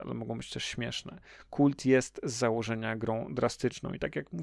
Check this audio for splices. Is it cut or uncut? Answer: uncut